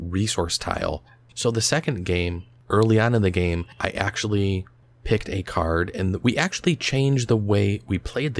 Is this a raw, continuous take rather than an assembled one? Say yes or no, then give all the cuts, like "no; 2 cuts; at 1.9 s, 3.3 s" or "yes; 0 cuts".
no; 1 cut; at 1.3 s